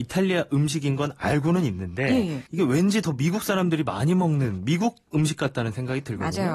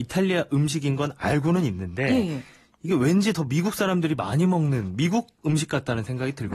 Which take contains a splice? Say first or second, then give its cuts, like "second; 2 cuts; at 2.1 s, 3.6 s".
first; 1 cut; at 2.5 s